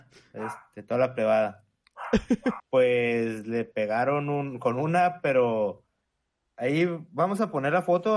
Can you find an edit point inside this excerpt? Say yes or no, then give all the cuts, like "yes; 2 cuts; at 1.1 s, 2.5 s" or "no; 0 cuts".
yes; 1 cut; at 2.6 s